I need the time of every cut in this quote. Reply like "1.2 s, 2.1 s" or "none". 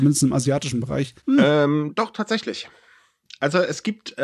1.2 s